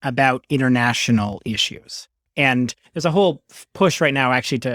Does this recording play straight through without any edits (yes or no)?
no